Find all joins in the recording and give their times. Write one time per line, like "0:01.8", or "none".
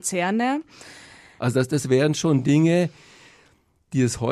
0:01.4